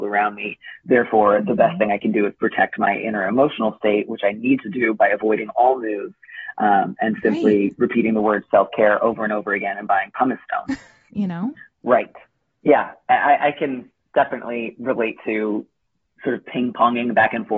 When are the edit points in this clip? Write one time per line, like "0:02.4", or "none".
0:11.1